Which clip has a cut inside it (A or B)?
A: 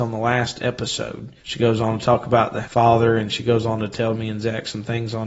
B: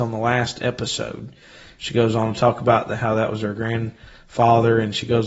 A